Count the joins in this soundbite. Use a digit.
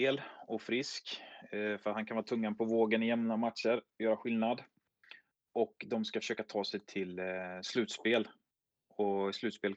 0